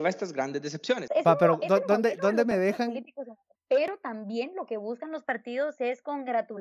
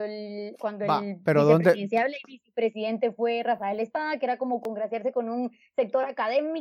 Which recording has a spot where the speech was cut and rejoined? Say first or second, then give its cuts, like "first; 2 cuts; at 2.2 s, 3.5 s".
first; 2 cuts; at 1.1 s, 3.6 s